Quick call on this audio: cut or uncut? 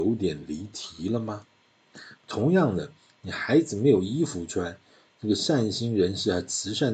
uncut